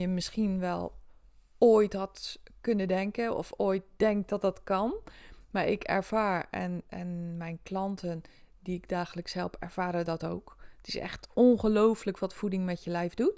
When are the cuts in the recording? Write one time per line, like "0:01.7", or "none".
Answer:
none